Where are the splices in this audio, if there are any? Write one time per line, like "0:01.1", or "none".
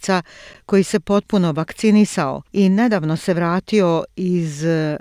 0:02.4